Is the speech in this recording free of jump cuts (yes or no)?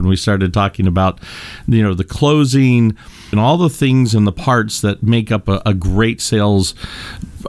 no